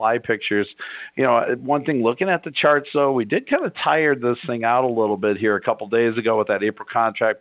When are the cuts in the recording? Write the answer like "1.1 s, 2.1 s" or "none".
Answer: none